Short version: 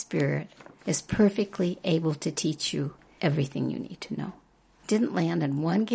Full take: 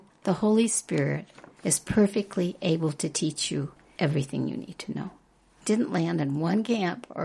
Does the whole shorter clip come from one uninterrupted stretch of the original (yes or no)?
yes